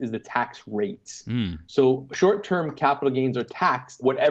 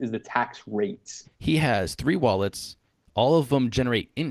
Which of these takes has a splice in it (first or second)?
second